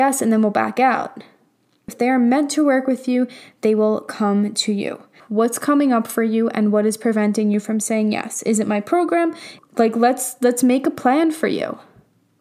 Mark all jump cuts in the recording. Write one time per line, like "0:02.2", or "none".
0:01.9
0:05.2
0:09.6